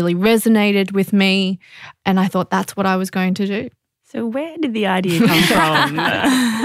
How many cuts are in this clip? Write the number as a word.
zero